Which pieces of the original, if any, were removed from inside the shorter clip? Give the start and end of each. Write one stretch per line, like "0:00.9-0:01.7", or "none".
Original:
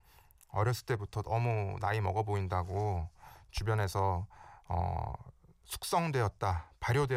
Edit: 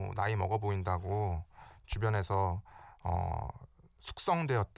none

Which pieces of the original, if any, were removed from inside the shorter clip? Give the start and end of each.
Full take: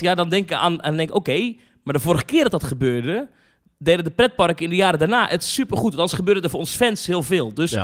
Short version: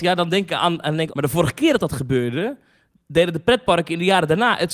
0:01.1-0:01.8

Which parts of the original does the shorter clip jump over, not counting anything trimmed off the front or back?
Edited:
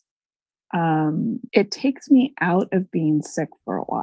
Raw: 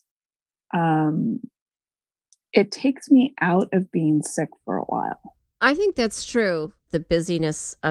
0:01.5-0:02.5

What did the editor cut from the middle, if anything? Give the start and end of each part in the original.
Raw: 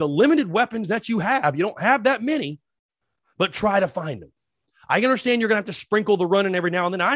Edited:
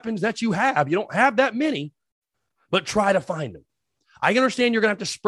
none

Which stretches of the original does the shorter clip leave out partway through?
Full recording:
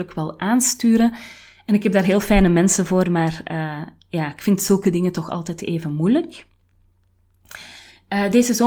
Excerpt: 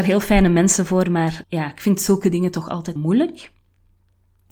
0:03.4-0:04.0
0:05.6-0:05.9

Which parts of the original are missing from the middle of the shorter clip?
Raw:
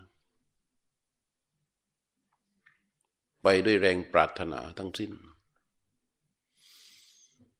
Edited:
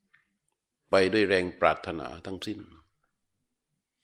none

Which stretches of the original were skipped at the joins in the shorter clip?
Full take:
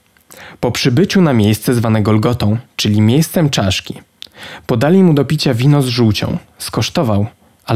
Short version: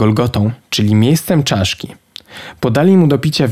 none

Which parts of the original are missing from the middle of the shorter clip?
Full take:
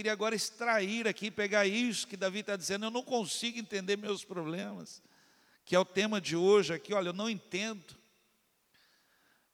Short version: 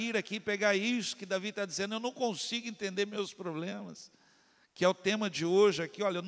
none

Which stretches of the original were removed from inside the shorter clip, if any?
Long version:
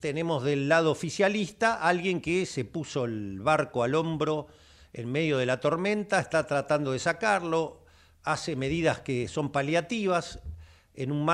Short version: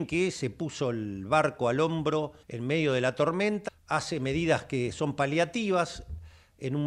0:04.6-0:04.9
0:06.1-0:08.0

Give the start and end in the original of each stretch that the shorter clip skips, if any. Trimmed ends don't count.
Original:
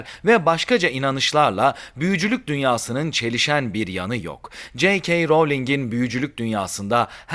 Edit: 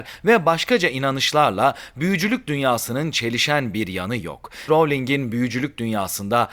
0:04.7-0:05.3

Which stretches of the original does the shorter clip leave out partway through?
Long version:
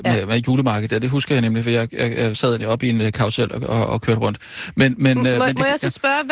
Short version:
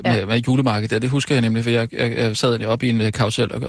none

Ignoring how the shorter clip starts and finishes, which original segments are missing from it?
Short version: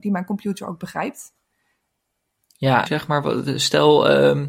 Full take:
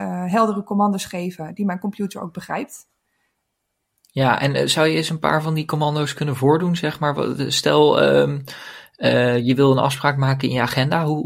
0:04.4-0:06.8

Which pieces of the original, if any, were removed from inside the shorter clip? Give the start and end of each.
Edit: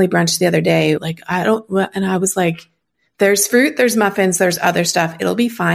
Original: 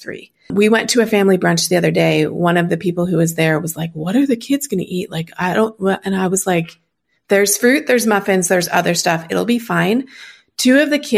0:02.3-0:05.1

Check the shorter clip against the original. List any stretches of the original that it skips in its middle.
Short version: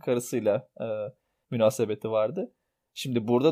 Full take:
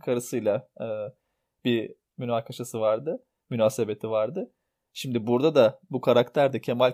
0:01.4-0:03.4

